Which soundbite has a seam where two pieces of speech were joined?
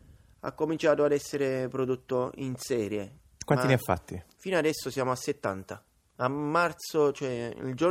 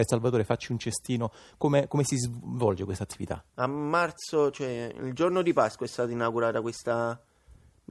second; 1 cut; at 3.5 s

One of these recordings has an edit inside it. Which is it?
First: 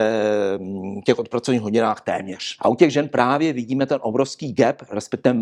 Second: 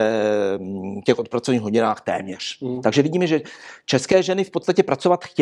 first; 1 cut; at 2.6 s

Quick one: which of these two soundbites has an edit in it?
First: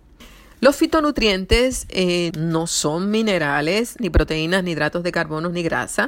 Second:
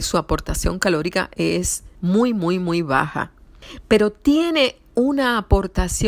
first; 2 cuts; at 2.3 s, 4.0 s

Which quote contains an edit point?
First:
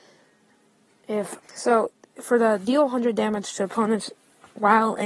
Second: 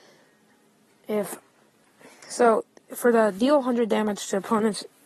first; 1 cut; at 1.4 s

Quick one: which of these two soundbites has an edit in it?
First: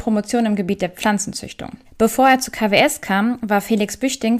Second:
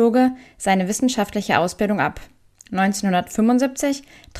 first; 1 cut; at 1.8 s

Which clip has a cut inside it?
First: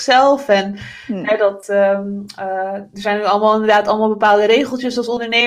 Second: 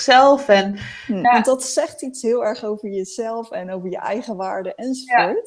second; 1 cut; at 1.2 s

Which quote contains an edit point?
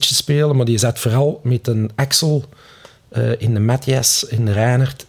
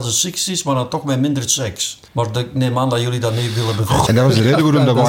second; 2 cuts; at 2.1 s, 4.1 s

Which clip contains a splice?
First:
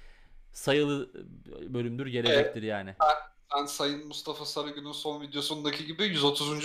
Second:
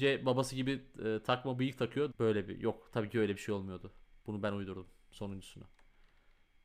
second; 1 cut; at 2.1 s

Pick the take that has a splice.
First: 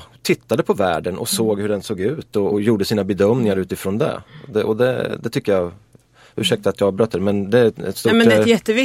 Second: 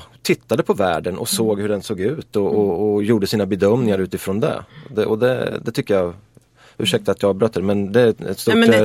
first; 1 cut; at 2.5 s

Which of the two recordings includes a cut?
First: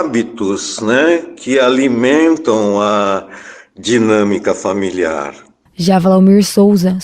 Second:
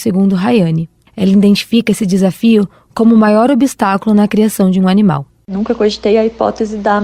first; 1 cut; at 5.7 s

